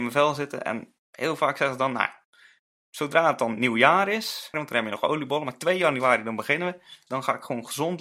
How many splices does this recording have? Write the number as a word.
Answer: two